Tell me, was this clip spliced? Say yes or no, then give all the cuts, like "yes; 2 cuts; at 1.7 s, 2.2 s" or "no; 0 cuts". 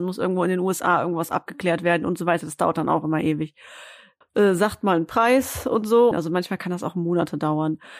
yes; 2 cuts; at 4.2 s, 6.1 s